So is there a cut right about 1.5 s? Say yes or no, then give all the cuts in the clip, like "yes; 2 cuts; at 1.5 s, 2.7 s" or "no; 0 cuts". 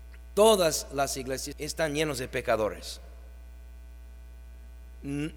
yes; 1 cut; at 1.5 s